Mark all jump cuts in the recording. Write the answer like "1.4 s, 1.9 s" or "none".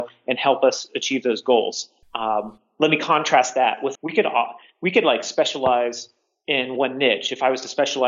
2.0 s, 3.9 s